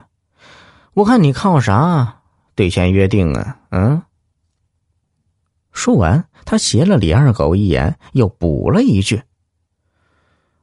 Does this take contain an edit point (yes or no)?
no